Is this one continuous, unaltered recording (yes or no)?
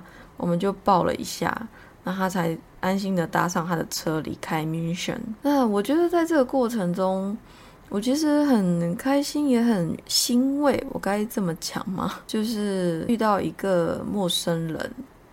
yes